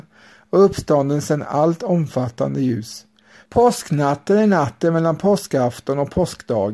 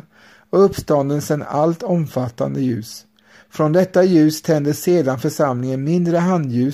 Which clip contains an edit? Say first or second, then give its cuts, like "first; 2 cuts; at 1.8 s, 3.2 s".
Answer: first; 1 cut; at 3.5 s